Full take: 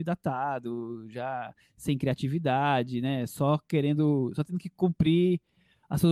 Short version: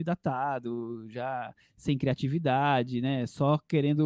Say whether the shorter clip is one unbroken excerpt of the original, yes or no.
yes